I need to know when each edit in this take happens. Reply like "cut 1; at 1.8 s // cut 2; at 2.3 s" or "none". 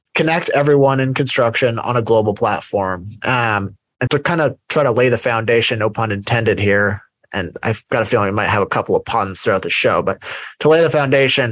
cut 1; at 4.1 s